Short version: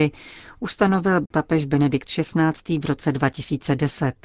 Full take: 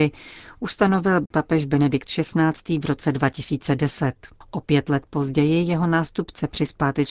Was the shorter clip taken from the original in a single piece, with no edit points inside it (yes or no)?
yes